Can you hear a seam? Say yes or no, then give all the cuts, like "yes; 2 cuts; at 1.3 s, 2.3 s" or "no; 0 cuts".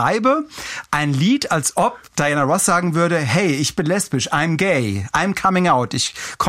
yes; 1 cut; at 2.1 s